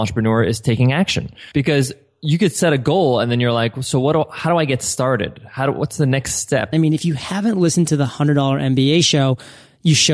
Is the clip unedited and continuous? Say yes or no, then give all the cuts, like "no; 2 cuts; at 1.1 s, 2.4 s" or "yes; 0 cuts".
no; 2 cuts; at 1.5 s, 6.7 s